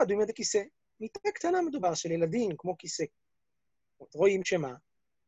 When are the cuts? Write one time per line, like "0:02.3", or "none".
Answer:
0:04.1